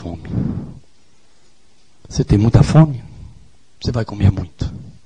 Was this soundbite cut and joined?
no; 0 cuts

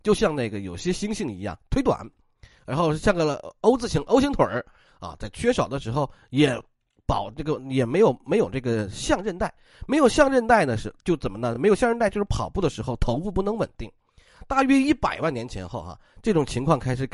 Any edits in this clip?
no; 0 cuts

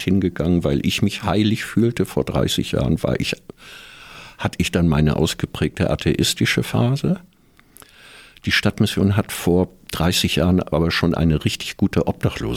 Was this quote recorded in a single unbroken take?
yes; 0 cuts

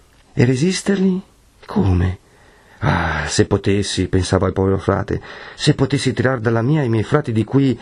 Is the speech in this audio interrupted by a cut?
no; 0 cuts

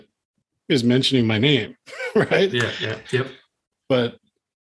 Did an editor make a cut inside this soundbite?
yes; 1 cut; at 3.0 s

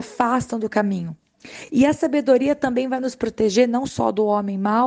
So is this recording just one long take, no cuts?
yes; 0 cuts

